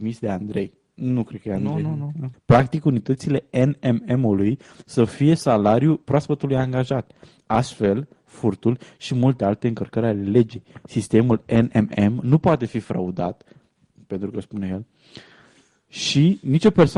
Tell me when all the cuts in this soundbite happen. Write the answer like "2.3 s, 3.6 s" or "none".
2.3 s, 8.2 s

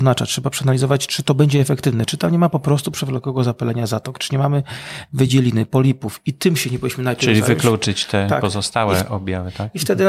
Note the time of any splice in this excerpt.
none

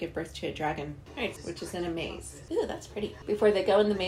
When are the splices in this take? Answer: 1.4 s, 2.5 s

